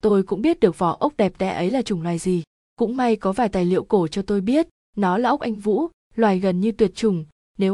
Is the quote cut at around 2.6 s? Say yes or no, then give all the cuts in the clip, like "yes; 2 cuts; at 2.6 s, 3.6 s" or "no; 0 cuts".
yes; 1 cut; at 2.6 s